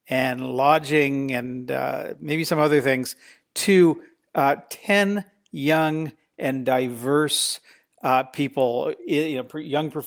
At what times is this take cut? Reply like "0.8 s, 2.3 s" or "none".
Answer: none